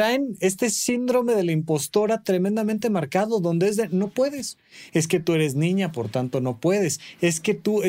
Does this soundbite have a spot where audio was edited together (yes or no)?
yes